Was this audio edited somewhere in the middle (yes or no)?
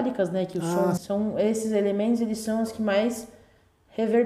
yes